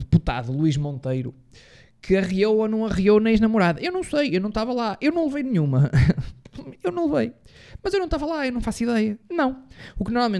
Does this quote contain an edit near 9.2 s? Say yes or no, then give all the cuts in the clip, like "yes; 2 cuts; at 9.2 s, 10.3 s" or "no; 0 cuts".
yes; 1 cut; at 9.2 s